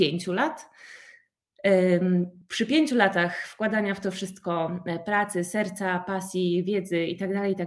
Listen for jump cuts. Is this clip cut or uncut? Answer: uncut